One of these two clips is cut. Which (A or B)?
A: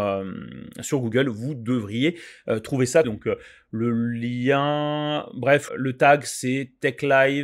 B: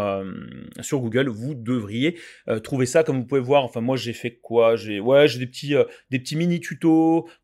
A